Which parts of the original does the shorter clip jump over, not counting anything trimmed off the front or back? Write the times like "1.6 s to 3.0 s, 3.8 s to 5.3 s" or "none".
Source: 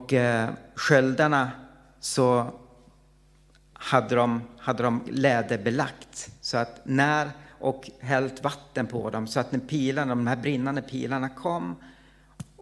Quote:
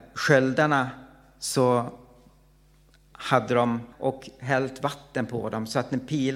4.5 s to 7.5 s